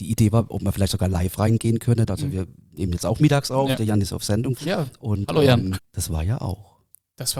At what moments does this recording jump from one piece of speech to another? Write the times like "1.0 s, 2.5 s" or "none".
2.1 s, 4.6 s, 5.8 s